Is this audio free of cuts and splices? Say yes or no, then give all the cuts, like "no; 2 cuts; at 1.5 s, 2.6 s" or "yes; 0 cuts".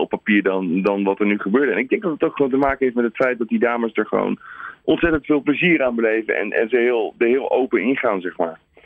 yes; 0 cuts